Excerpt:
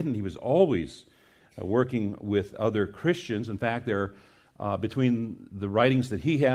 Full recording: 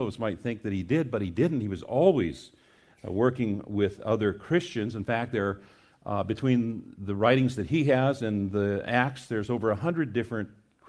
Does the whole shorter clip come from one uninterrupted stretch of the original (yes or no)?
yes